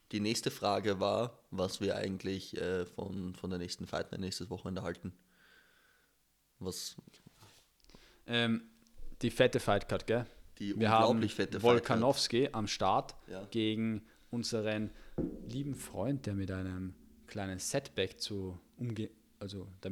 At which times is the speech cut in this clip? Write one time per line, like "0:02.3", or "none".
none